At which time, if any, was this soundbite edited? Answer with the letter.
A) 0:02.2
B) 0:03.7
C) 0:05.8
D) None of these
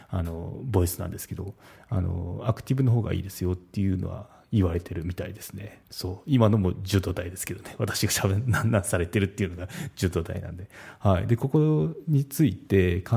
C